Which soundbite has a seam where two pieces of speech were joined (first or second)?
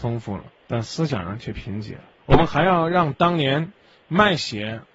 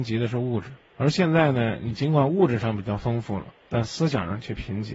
first